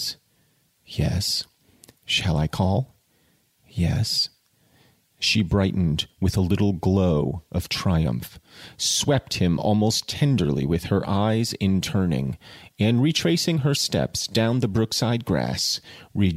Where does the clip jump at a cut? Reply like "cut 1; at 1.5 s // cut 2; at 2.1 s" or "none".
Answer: none